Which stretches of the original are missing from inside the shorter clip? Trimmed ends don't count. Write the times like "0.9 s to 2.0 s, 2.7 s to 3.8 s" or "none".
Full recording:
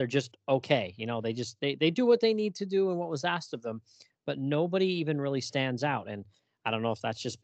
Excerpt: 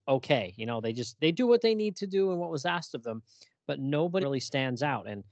1.6 s to 1.8 s, 4.8 s to 5.2 s